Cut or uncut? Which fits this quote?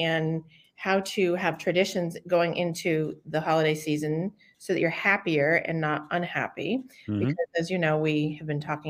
uncut